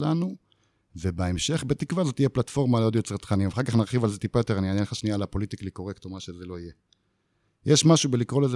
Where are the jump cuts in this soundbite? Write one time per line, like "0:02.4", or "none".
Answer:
none